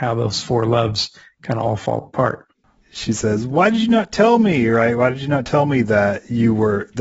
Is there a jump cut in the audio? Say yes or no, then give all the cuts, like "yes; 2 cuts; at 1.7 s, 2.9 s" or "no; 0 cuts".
no; 0 cuts